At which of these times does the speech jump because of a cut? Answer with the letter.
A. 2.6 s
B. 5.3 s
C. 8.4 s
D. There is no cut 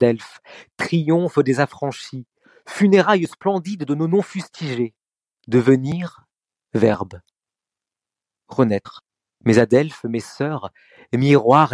B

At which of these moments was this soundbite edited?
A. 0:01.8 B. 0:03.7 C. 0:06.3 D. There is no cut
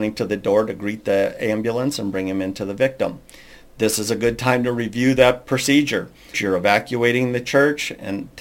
C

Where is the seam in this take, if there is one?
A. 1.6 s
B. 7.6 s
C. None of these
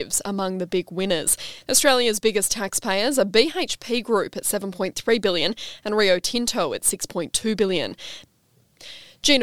A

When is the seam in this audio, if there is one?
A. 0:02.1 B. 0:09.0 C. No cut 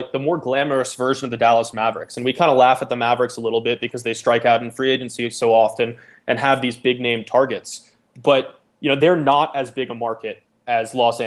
B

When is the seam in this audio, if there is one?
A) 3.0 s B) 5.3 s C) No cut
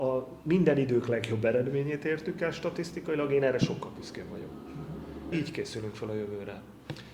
B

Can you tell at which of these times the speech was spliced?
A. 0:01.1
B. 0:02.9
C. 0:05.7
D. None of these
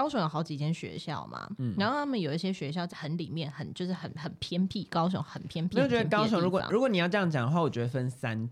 B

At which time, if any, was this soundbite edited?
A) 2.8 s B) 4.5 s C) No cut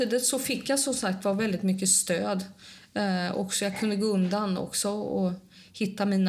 C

